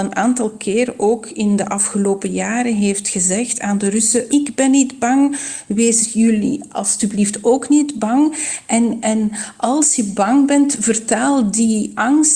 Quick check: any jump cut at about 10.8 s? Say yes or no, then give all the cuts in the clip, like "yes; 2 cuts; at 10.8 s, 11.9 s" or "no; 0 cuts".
no; 1 cut; at 4.3 s